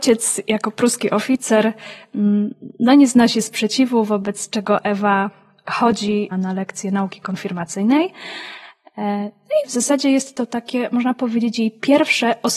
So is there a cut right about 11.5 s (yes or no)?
no